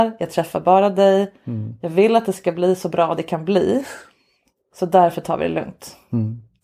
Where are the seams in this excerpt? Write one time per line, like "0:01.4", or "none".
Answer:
none